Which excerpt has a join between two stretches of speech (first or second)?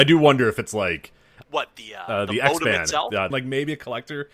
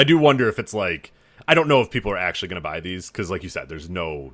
first